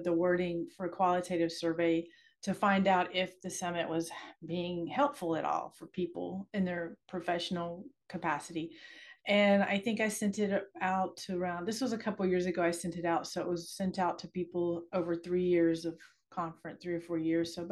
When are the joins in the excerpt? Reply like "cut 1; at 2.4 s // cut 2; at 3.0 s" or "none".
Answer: none